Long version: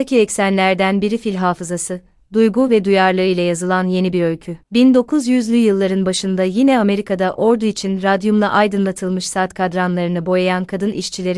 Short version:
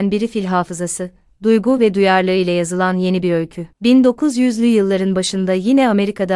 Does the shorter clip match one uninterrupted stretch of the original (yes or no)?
yes